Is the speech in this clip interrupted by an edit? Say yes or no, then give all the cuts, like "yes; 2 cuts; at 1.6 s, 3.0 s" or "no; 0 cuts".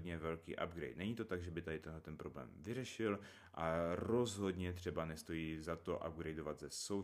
no; 0 cuts